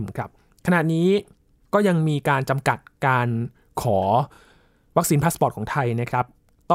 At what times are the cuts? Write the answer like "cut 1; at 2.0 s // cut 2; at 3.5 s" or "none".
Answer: none